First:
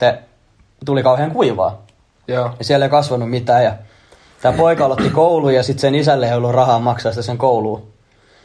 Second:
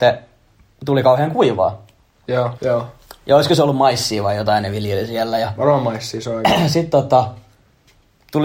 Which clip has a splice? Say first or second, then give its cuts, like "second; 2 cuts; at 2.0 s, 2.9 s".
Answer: second; 1 cut; at 2.6 s